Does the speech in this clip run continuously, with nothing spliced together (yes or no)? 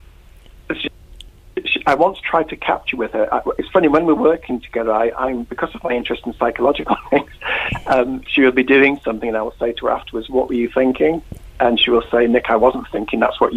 yes